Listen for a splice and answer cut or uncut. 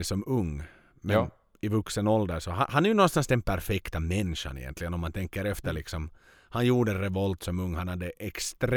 uncut